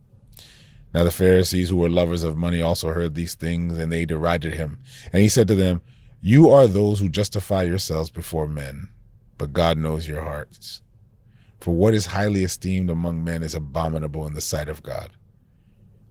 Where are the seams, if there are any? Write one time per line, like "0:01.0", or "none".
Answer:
none